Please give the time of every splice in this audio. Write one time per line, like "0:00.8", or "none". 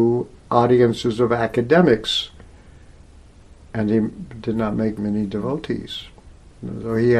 0:05.0